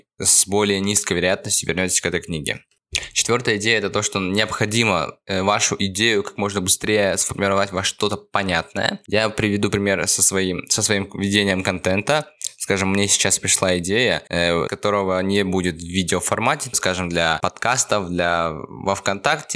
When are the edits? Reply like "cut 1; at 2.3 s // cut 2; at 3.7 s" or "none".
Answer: cut 1; at 14.7 s // cut 2; at 16.7 s